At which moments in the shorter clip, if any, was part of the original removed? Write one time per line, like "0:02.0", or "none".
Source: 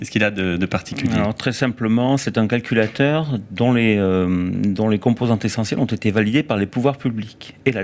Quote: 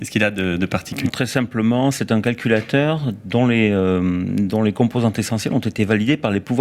0:01.1